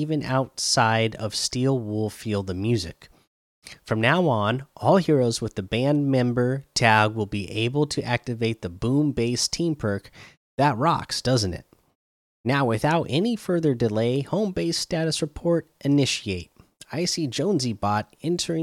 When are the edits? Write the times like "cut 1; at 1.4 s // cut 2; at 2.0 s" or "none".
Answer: none